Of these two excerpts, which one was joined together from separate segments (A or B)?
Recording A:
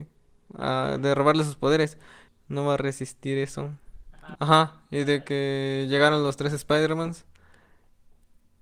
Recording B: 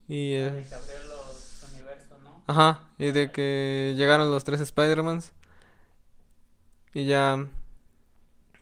A